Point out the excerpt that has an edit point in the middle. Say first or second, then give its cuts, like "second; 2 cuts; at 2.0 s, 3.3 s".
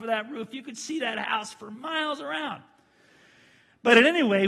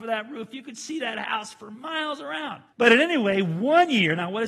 second; 1 cut; at 2.7 s